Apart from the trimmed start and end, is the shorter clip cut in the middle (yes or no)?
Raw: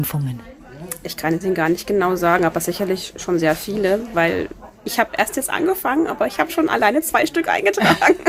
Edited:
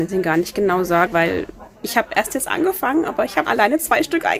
yes